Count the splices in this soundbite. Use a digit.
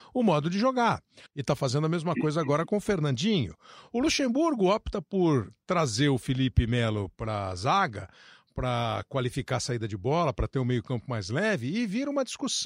1